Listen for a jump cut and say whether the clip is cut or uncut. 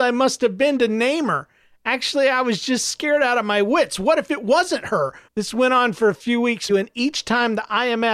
cut